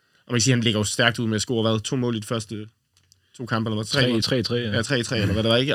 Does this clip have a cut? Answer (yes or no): no